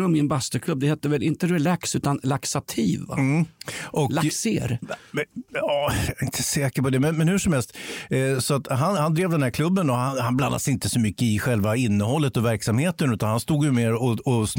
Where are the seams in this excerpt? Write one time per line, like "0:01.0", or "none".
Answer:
none